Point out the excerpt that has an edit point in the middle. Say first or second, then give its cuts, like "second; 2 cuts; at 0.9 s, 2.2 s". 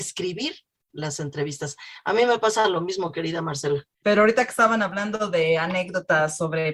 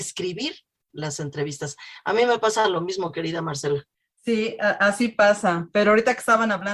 first; 1 cut; at 4.0 s